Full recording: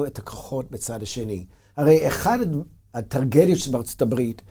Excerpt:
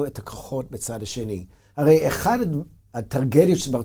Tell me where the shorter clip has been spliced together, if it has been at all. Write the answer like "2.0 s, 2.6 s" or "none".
none